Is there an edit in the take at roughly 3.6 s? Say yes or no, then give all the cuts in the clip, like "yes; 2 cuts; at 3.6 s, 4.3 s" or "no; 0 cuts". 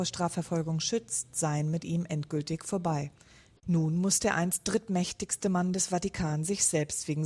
yes; 1 cut; at 3.6 s